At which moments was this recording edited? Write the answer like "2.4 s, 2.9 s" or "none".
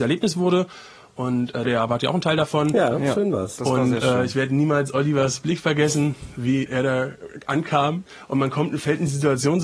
1.7 s, 6.7 s, 8.1 s

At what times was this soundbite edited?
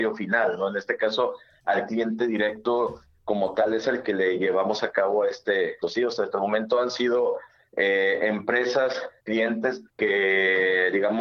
5.8 s, 9.9 s

